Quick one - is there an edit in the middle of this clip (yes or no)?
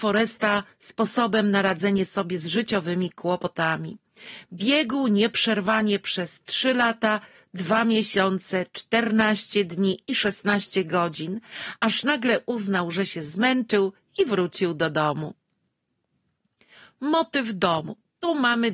no